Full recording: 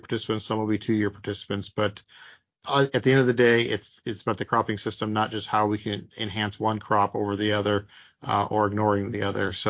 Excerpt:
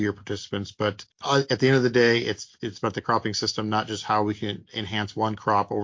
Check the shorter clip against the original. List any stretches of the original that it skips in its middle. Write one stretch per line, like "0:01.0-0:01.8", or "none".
0:02.1-0:02.6